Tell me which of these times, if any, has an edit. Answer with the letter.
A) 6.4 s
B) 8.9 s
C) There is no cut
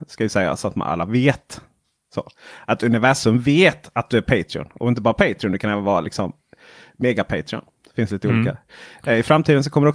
C